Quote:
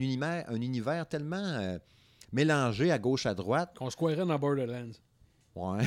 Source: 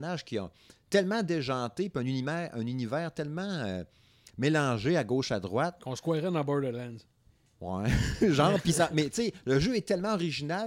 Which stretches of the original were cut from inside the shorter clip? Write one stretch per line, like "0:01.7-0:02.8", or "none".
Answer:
none